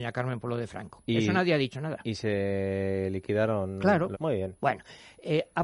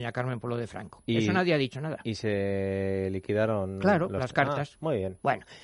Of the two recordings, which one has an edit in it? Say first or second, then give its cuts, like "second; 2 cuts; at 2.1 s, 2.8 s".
first; 1 cut; at 4.1 s